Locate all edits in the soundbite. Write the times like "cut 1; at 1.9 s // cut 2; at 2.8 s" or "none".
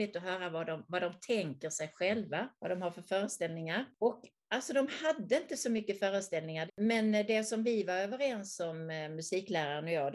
cut 1; at 2.6 s // cut 2; at 6.7 s